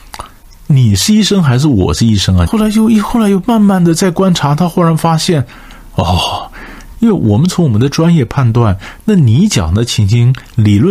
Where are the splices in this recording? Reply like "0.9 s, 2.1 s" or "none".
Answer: 2.5 s, 6.9 s

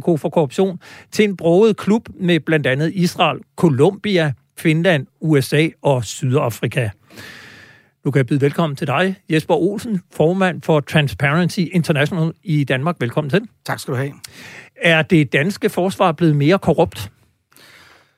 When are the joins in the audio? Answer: none

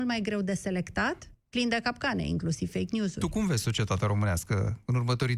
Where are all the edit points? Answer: 1.3 s

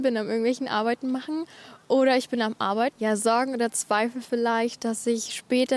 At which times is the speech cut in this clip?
2.9 s

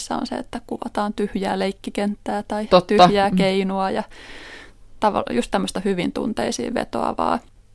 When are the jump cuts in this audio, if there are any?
none

